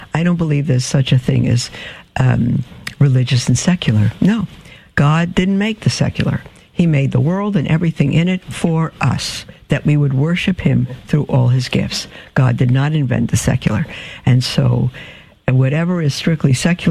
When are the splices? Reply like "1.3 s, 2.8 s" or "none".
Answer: none